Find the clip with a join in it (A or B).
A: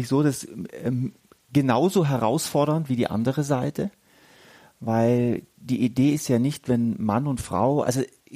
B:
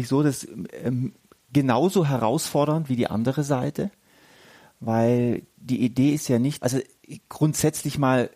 B